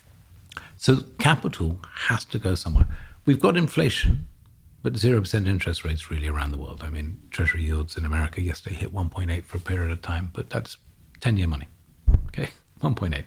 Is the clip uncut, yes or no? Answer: yes